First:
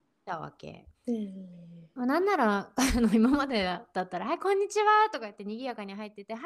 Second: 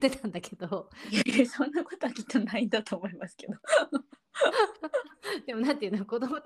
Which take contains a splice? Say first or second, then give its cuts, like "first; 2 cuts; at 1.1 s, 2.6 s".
first; 1 cut; at 0.9 s